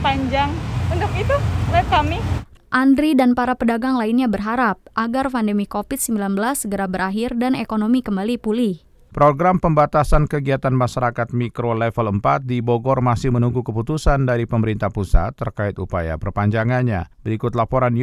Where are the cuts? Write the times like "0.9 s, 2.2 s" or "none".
17.1 s